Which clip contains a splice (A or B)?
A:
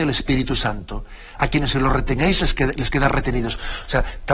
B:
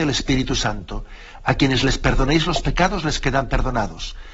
A